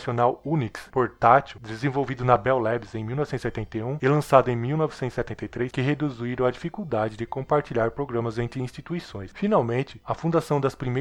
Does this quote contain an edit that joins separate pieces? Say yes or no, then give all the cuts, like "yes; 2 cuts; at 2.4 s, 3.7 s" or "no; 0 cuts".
yes; 1 cut; at 5.7 s